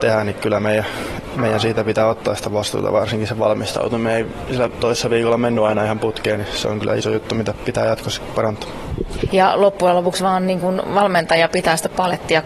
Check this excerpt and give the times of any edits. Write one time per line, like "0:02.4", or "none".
0:09.3